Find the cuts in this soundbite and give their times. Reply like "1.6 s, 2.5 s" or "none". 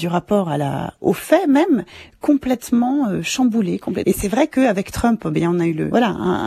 4.0 s